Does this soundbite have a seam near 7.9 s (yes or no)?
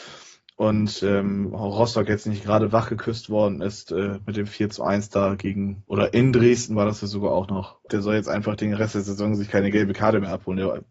yes